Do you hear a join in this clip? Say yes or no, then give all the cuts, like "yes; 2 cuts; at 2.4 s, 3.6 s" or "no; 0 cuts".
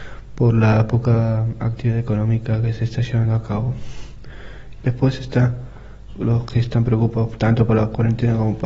yes; 2 cuts; at 4.8 s, 6.1 s